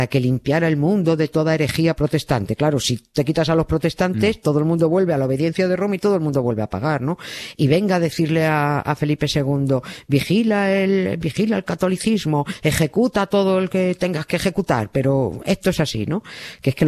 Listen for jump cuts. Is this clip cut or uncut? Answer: uncut